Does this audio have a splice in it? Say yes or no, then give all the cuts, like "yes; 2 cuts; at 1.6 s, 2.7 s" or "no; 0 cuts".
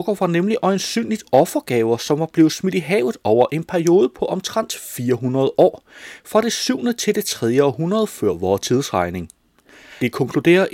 no; 0 cuts